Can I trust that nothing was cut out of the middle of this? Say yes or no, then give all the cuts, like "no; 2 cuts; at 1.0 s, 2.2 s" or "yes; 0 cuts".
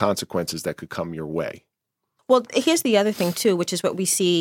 no; 1 cut; at 2.2 s